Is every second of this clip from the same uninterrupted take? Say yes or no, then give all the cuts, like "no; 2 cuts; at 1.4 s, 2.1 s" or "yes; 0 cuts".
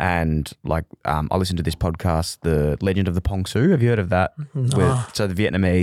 yes; 0 cuts